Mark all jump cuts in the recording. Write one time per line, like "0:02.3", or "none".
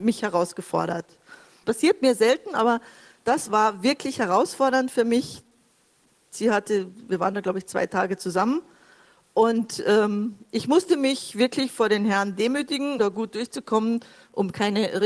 0:01.6
0:13.0